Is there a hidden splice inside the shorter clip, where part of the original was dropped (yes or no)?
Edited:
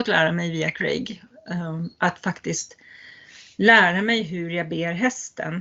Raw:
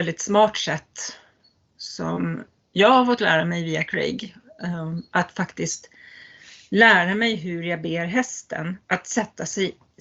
no